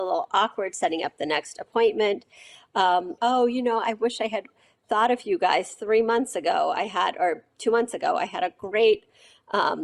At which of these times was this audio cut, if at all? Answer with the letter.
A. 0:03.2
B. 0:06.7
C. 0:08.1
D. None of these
A